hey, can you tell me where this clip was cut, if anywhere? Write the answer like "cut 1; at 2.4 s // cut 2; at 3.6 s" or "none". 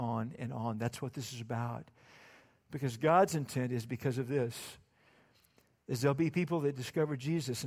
none